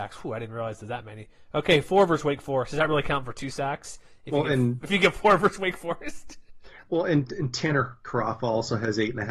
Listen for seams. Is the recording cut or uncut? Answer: uncut